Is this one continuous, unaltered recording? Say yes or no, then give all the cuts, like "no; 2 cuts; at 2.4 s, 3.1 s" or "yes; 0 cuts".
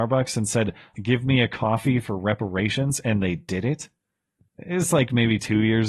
no; 2 cuts; at 0.9 s, 4.5 s